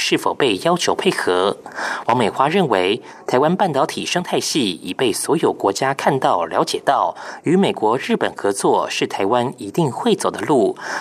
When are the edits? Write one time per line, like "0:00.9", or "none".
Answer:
none